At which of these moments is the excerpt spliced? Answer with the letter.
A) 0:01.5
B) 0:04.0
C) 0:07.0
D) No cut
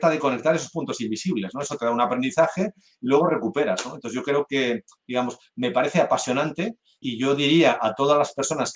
C